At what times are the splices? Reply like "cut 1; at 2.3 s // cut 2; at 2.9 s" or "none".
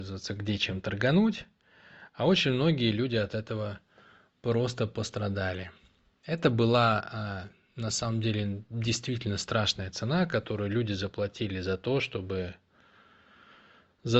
none